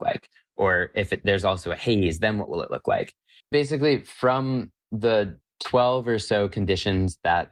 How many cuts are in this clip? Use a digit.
1